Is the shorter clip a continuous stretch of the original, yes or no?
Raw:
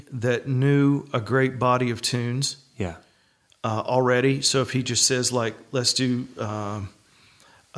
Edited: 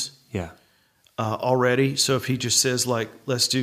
yes